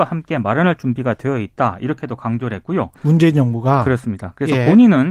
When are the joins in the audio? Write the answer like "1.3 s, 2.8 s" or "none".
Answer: 3.0 s